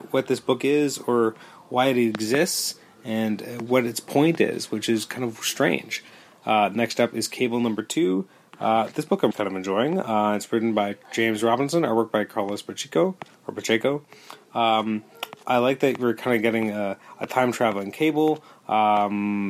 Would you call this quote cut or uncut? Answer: cut